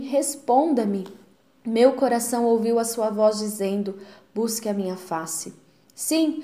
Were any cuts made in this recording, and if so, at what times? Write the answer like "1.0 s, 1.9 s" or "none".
none